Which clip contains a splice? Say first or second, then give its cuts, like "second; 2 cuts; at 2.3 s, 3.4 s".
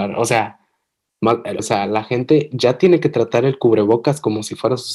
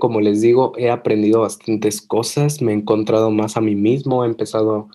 first; 1 cut; at 1.6 s